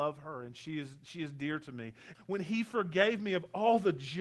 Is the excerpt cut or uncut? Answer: cut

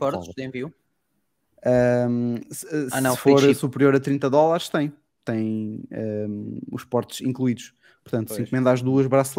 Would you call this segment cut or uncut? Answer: cut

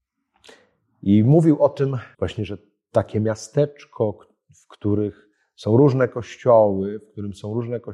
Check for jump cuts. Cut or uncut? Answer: cut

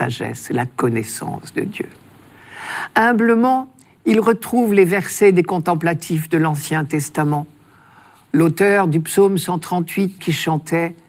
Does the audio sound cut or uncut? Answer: cut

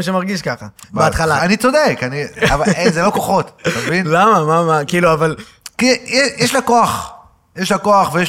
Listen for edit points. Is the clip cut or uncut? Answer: cut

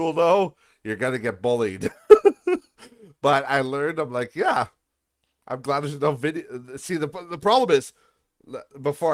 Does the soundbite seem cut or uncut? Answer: uncut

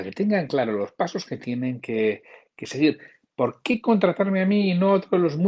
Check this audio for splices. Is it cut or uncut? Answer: uncut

